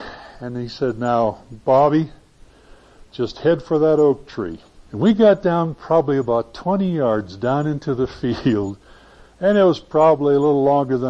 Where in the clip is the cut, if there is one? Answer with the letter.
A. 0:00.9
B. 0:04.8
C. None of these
B